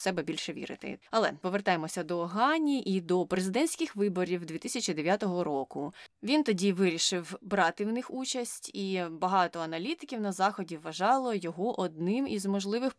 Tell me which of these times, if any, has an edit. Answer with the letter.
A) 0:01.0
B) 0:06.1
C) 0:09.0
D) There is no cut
A